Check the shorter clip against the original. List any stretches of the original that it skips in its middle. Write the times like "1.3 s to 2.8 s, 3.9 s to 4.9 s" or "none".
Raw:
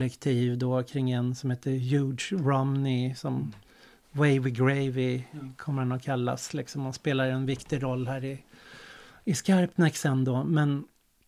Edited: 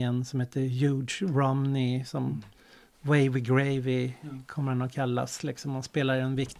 none